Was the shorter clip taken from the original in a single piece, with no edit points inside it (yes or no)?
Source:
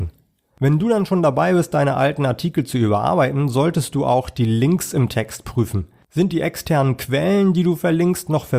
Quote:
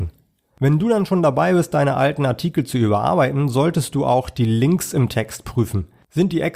yes